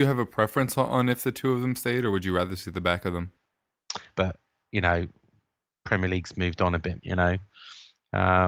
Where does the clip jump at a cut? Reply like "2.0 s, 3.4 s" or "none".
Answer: 4.1 s, 7.0 s